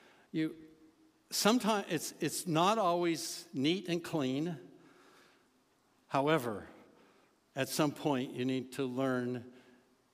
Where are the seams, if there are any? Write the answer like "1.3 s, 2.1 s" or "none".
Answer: none